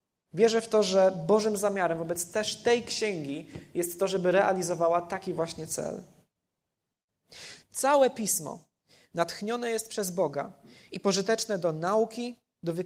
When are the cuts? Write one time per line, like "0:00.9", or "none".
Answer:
0:07.6